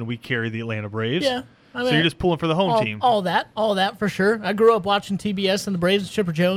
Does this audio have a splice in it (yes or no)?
no